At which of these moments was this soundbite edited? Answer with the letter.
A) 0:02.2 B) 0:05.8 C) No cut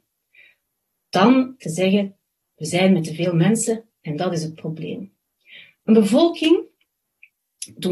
B